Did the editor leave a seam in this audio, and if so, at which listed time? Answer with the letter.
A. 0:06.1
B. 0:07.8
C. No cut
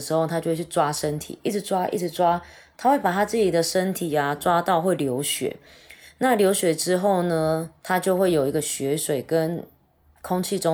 B